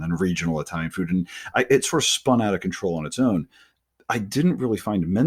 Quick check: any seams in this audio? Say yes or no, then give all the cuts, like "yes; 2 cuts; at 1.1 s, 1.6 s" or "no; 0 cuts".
no; 0 cuts